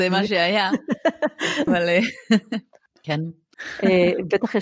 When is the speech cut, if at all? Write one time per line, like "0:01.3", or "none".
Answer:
0:01.7
0:03.5